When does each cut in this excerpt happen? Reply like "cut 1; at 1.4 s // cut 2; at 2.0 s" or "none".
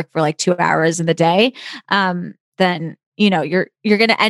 none